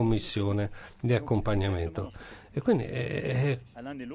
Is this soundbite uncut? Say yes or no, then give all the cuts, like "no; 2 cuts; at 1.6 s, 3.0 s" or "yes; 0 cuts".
yes; 0 cuts